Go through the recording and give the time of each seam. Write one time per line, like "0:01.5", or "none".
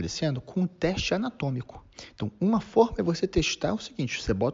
none